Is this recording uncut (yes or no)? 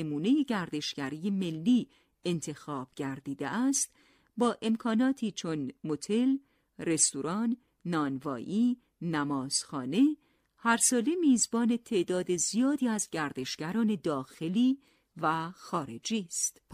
no